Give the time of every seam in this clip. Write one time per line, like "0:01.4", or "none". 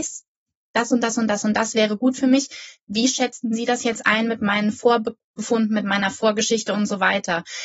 none